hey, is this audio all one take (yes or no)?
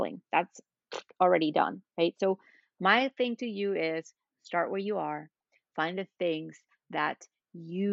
yes